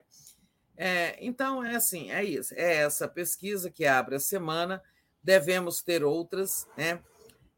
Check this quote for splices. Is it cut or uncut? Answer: uncut